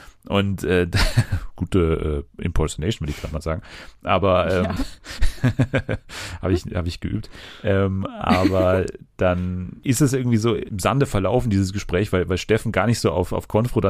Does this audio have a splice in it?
no; 0 cuts

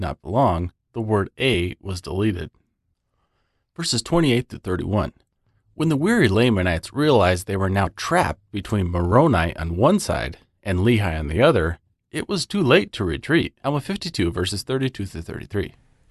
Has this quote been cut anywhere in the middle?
yes; 1 cut; at 13.6 s

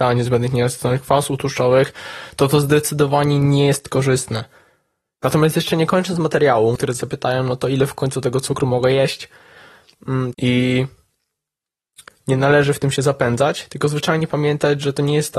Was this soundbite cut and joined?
yes; 3 cuts; at 5.1 s, 6.8 s, 10.3 s

